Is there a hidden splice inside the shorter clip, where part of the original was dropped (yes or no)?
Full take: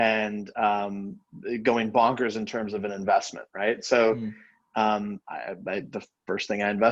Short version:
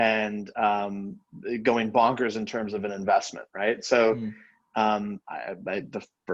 no